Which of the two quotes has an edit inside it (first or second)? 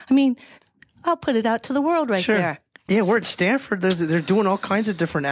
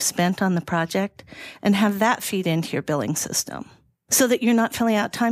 first